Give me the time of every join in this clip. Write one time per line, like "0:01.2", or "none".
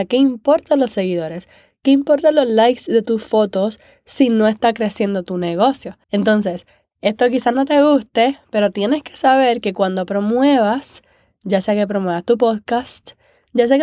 0:06.0